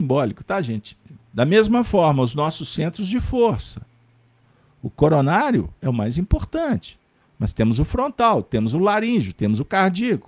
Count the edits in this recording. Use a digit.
1